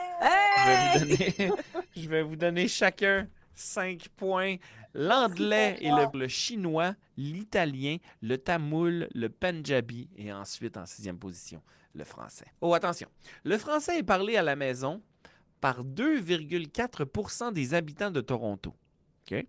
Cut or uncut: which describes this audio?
cut